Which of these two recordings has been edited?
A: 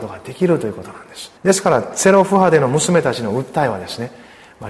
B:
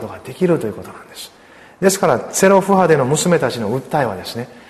A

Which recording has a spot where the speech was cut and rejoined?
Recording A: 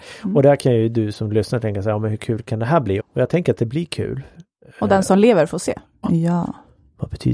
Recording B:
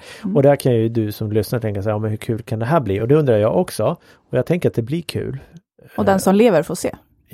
A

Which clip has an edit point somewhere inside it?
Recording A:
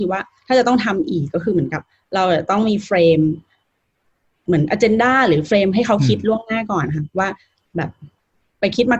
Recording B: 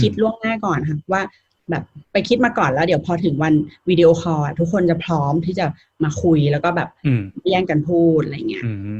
B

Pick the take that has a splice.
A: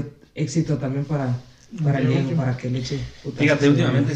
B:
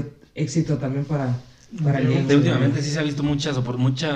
B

